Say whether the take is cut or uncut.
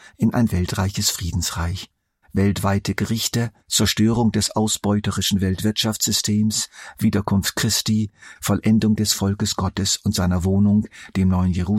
cut